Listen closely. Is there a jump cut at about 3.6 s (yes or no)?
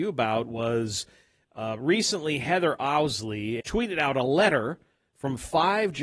yes